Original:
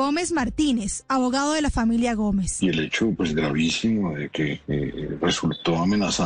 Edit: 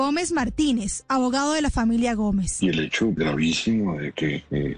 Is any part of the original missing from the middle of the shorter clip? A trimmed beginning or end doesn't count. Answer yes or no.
yes